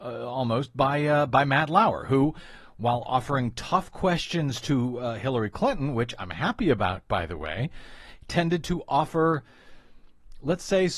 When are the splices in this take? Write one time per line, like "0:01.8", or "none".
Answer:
none